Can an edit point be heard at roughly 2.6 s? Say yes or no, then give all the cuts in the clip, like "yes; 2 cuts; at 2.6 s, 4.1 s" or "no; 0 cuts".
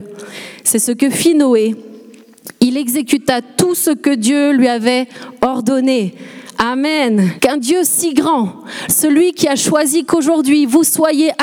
no; 2 cuts; at 7.4 s, 8.9 s